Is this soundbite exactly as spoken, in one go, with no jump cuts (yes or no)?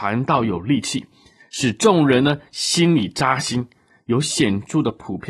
yes